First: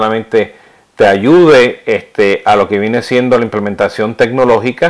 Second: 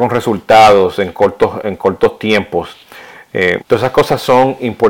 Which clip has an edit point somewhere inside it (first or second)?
second